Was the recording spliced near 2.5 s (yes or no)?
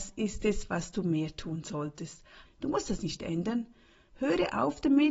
yes